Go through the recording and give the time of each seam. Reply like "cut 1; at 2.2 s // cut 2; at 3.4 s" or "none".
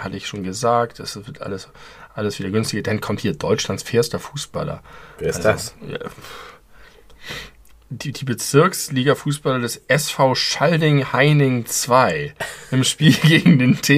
none

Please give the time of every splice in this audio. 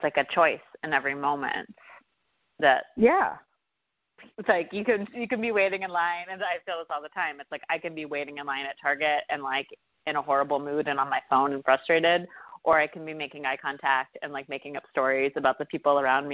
none

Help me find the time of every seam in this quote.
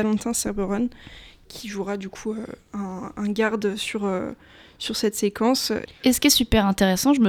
cut 1; at 5.9 s

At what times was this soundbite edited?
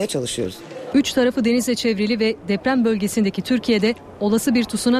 cut 1; at 0.9 s

